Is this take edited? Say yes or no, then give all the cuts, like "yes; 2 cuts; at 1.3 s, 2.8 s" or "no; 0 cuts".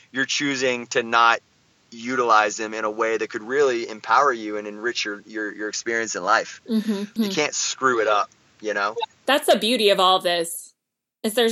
yes; 1 cut; at 7.2 s